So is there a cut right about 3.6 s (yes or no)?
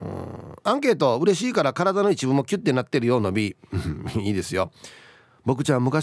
no